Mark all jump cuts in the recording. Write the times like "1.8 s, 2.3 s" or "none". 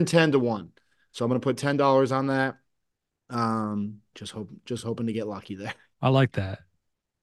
4.1 s, 5.9 s